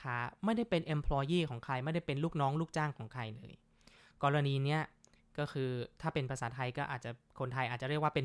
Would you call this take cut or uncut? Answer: uncut